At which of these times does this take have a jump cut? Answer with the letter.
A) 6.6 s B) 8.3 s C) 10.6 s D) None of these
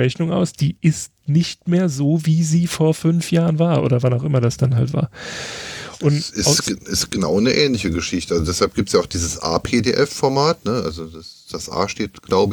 D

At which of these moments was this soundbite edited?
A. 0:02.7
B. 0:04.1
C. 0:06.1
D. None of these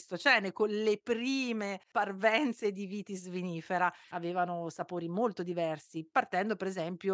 B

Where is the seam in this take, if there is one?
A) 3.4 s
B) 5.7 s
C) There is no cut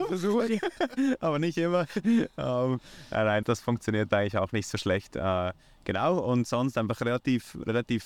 A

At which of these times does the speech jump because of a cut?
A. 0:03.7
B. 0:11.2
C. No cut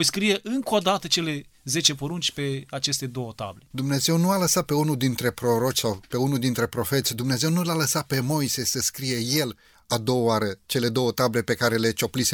A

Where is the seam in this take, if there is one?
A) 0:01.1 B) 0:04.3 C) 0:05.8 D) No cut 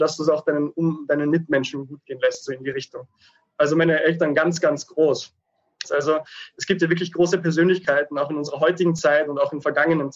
C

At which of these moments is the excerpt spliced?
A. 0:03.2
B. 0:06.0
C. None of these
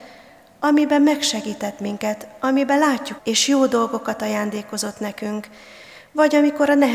A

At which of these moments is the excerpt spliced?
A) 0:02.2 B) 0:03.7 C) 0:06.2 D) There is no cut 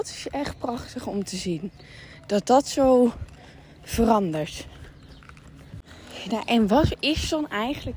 D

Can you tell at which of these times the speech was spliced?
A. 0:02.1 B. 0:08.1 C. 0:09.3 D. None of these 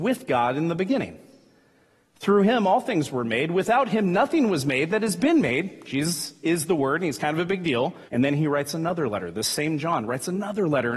B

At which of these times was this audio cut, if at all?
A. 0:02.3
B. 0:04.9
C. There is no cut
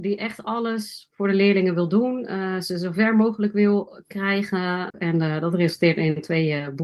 B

